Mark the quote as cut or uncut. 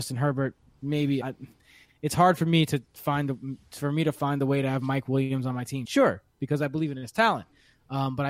cut